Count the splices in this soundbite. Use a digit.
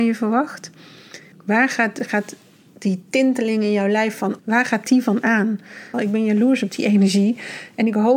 3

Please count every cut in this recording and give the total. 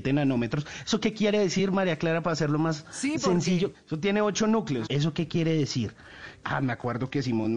3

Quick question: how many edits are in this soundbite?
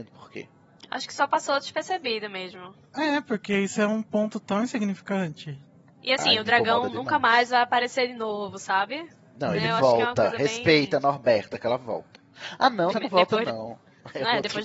1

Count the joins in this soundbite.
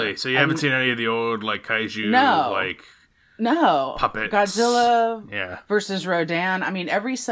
0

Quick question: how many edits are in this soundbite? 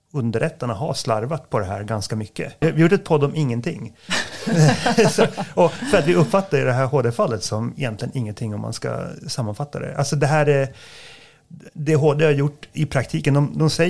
1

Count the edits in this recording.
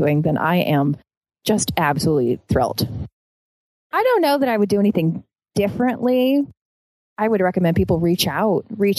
1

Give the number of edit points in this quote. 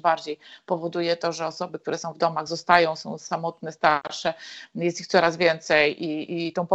0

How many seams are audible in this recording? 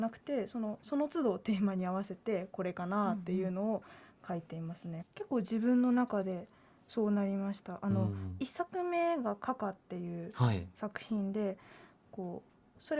1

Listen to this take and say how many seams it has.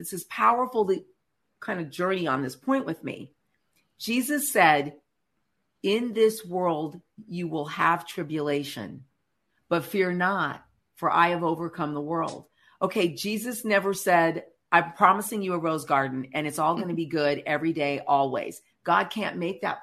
1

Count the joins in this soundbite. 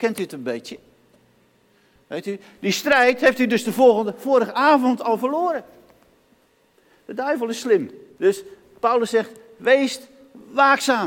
1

